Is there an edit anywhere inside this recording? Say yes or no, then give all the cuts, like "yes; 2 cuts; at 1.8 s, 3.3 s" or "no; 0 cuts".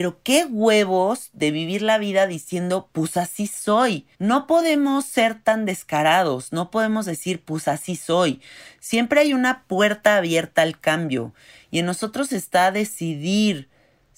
yes; 1 cut; at 4.1 s